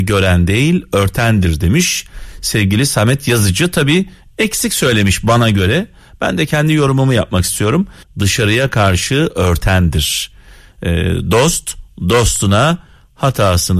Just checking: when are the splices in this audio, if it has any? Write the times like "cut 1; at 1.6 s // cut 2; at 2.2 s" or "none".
cut 1; at 8.0 s